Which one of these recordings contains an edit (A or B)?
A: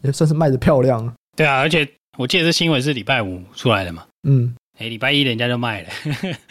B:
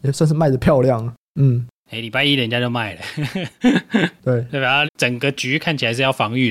B